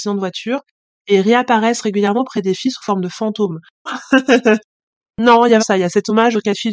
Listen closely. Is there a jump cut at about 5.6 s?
yes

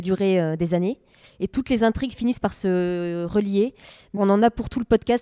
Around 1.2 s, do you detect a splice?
yes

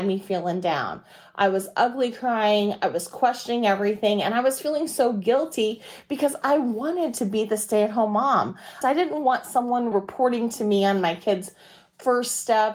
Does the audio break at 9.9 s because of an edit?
yes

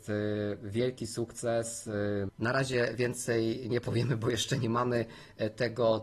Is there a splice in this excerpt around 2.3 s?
yes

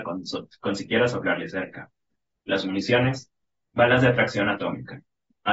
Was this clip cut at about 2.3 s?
no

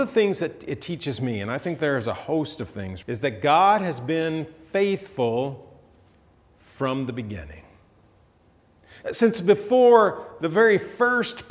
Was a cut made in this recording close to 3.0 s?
yes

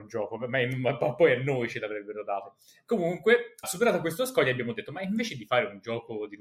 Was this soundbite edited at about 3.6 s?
yes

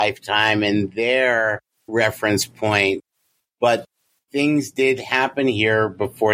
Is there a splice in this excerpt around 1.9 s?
yes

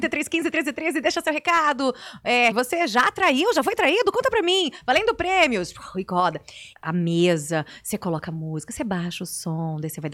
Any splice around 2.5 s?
yes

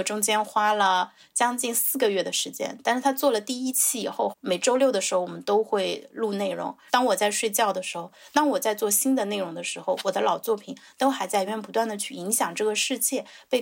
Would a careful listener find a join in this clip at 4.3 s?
yes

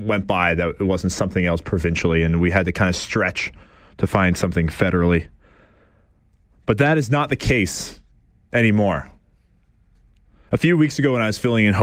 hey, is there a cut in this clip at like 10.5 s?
yes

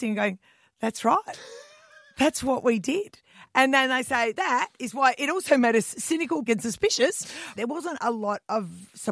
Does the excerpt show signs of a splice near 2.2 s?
no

